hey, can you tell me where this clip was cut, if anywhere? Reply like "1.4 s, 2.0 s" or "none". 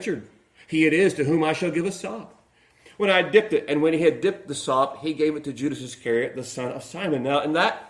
none